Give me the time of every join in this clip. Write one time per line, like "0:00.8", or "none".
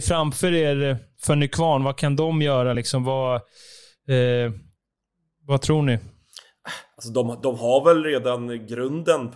none